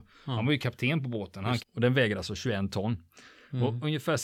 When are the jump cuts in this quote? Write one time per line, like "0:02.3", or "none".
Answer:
0:01.6